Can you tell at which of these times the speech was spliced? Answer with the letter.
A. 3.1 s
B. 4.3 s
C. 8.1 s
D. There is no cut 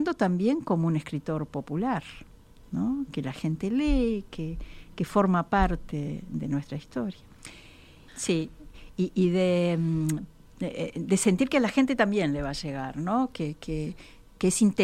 C